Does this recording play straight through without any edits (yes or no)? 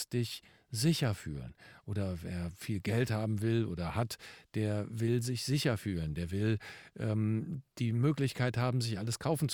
yes